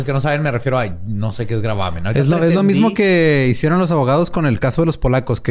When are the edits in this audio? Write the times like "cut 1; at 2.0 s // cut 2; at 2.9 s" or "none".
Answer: none